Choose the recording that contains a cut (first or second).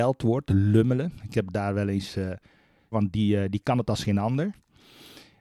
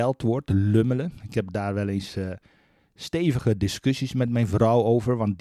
first